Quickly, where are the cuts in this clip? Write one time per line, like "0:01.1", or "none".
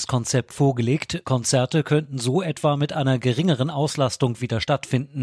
0:01.2